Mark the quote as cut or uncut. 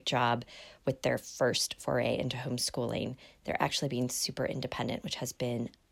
uncut